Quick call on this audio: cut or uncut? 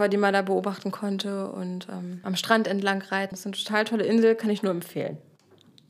cut